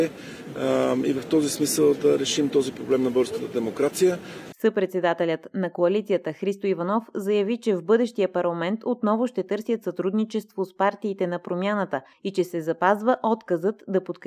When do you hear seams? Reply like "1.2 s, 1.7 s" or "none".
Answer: 4.5 s